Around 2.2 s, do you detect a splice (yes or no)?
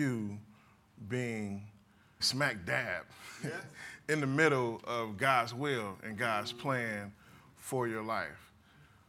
yes